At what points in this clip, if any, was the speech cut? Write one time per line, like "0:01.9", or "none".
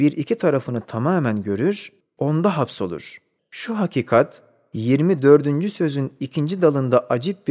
0:02.0
0:03.4